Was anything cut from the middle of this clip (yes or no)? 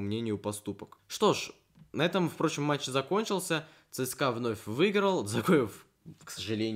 no